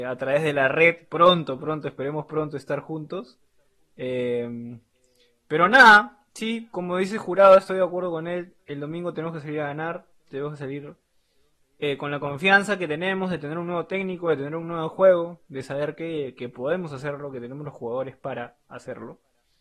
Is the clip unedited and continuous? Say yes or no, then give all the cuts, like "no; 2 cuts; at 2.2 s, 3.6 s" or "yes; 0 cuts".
yes; 0 cuts